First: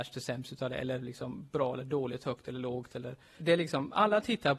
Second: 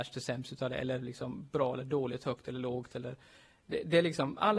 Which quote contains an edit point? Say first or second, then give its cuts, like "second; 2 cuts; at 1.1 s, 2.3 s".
first; 1 cut; at 3.4 s